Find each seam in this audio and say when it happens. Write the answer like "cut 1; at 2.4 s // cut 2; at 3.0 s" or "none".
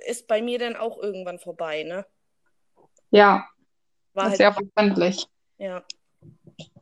none